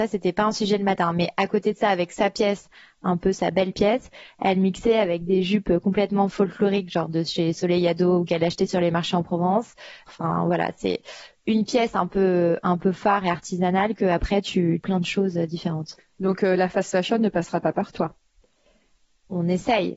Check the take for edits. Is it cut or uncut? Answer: cut